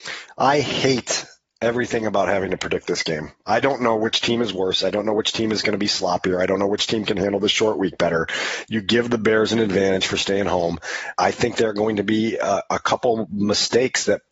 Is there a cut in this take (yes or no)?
yes